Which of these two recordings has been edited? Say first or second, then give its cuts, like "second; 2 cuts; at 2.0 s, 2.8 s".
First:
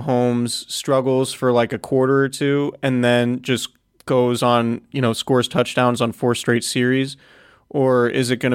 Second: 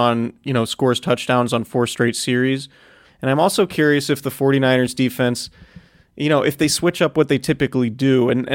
second; 1 cut; at 3.0 s